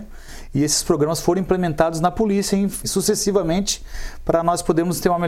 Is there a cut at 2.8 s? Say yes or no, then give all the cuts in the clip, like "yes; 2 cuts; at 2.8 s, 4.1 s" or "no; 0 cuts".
yes; 1 cut; at 2.8 s